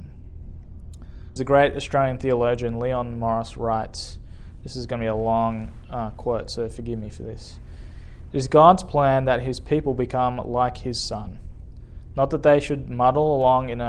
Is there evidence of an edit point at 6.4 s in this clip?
no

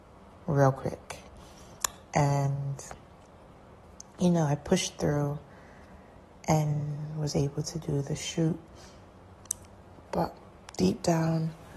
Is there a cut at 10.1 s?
yes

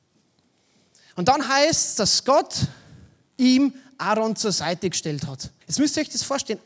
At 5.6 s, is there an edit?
yes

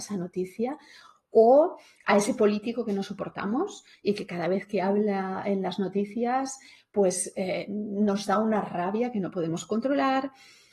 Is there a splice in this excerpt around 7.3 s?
no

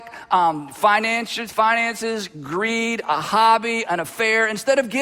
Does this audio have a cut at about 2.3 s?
no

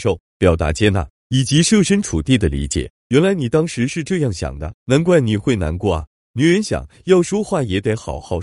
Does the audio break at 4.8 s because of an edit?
yes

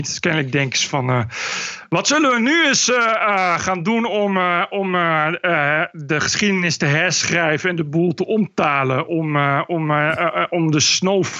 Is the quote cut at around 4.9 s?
no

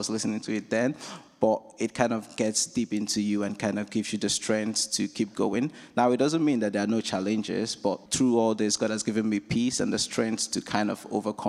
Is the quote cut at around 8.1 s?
yes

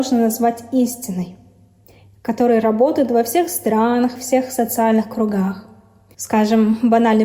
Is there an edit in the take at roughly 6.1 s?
yes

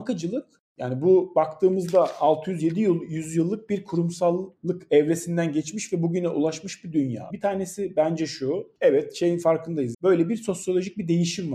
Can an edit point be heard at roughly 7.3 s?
yes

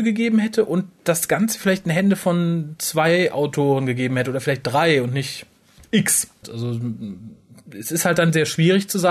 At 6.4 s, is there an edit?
yes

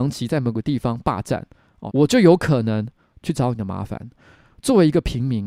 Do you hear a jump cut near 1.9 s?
yes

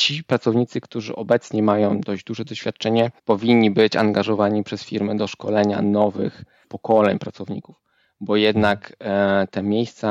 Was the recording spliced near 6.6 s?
yes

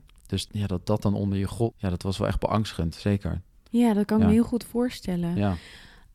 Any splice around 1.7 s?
yes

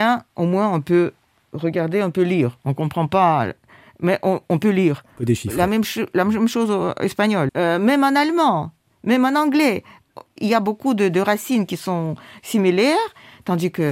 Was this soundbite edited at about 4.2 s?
no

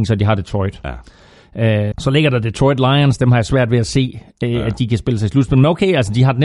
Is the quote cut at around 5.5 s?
no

